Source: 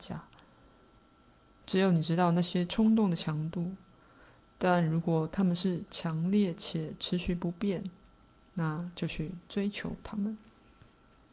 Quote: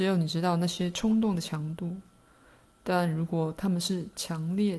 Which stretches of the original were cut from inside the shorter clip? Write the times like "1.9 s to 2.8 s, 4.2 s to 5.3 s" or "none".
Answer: none